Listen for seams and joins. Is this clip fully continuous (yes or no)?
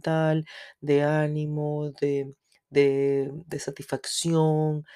yes